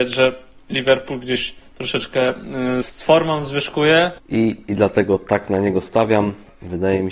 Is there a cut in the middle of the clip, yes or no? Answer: yes